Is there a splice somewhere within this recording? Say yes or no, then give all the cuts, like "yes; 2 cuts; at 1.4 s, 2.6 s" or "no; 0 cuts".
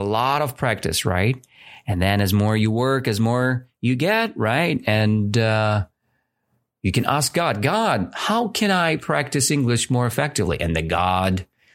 no; 0 cuts